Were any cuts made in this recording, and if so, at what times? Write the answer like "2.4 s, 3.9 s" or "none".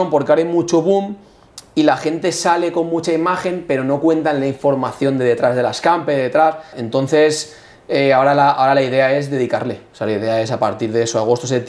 6.7 s